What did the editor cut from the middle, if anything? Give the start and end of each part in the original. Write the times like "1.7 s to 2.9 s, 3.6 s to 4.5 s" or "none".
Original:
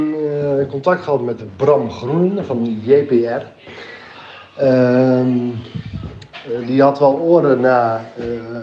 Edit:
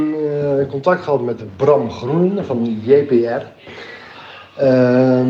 none